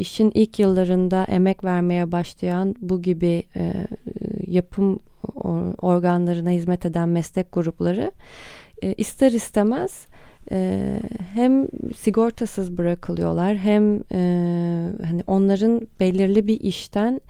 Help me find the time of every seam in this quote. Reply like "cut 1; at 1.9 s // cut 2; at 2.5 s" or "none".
cut 1; at 3.5 s